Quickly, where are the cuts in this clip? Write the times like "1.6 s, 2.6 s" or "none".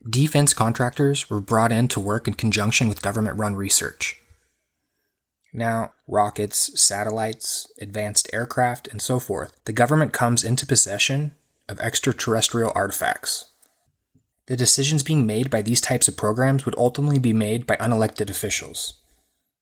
5.9 s, 9.6 s, 14.3 s